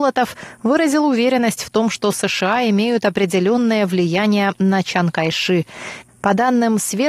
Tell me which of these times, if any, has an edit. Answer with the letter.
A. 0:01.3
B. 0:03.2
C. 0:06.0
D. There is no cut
C